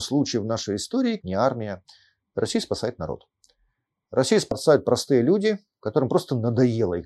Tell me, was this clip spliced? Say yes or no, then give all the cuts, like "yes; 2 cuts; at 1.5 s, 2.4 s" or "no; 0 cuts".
yes; 1 cut; at 1.2 s